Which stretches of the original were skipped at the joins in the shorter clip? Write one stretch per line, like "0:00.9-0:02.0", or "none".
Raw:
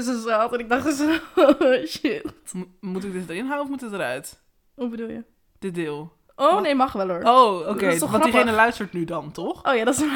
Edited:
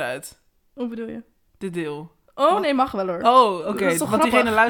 none